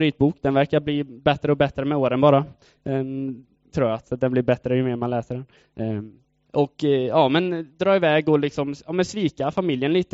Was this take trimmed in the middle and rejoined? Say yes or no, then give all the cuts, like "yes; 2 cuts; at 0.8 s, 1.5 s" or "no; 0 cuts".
yes; 2 cuts; at 3.7 s, 6.5 s